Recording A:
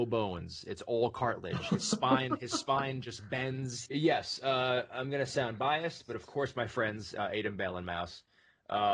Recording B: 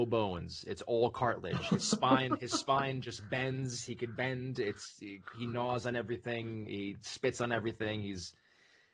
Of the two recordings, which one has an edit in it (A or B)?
A